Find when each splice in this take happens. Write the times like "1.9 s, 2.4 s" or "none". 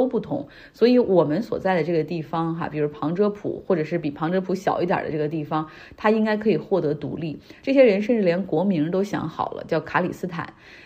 none